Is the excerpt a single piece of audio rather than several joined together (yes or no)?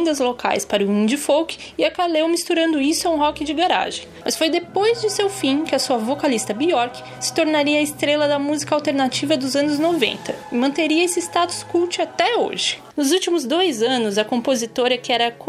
no